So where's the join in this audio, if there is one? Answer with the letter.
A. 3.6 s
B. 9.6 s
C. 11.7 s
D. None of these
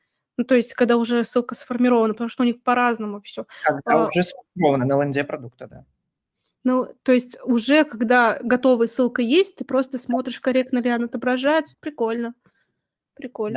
C